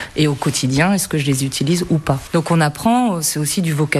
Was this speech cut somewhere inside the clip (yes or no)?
yes